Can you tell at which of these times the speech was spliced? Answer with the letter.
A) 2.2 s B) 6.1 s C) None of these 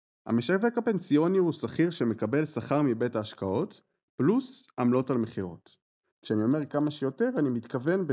B